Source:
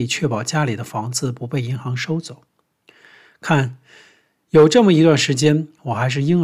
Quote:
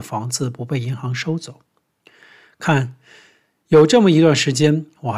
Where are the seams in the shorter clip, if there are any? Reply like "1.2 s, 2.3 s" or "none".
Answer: none